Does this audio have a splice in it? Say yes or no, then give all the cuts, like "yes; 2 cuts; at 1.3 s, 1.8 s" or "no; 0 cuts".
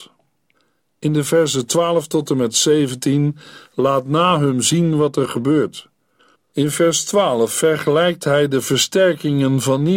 yes; 1 cut; at 6.3 s